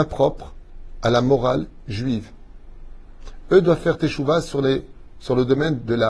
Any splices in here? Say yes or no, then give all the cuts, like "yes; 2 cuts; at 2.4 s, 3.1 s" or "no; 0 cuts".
no; 0 cuts